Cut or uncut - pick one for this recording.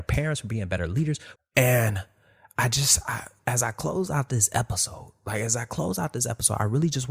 cut